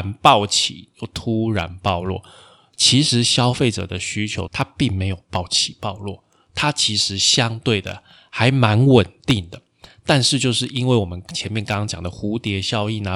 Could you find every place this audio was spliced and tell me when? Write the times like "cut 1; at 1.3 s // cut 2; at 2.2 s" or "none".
cut 1; at 4.5 s